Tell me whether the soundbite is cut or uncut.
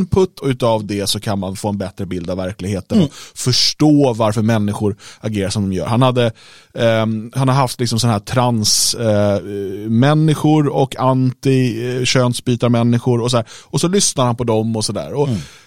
uncut